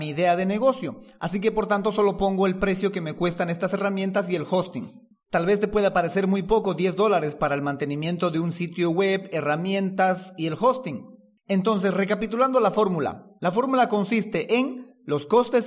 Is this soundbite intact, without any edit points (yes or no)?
no